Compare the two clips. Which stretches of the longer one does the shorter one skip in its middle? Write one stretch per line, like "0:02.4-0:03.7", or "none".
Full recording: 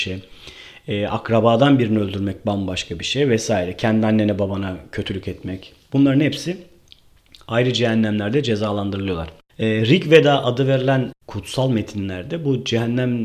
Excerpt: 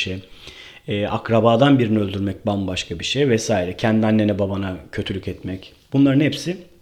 none